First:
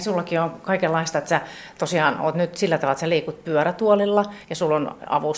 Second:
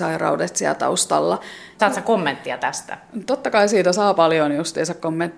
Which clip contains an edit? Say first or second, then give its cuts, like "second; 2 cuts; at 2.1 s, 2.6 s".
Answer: second; 1 cut; at 1.8 s